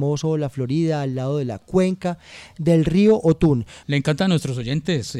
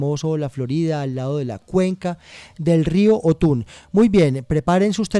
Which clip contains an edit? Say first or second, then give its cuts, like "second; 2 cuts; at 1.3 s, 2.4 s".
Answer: first; 1 cut; at 3.8 s